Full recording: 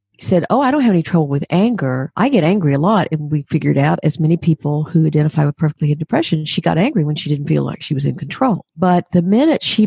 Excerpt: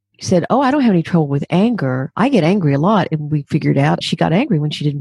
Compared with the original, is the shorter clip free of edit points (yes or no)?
no